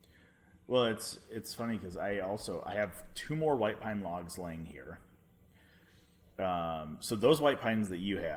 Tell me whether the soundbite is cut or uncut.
uncut